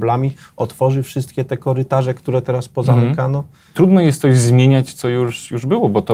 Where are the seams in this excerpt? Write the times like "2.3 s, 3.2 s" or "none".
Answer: 3.7 s

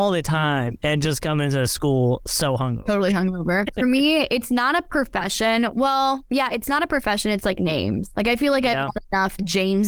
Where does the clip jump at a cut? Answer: none

